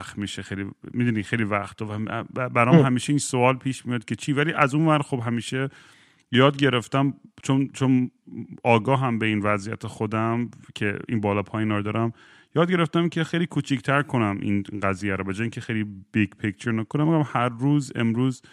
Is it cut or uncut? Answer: uncut